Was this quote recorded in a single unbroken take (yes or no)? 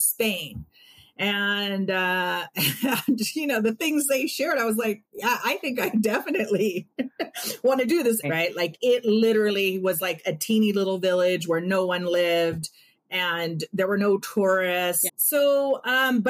no